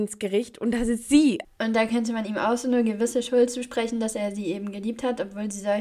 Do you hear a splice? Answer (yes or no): yes